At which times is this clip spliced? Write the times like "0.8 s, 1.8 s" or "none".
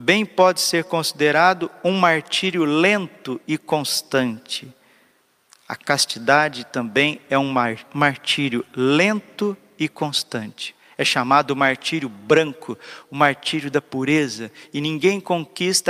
none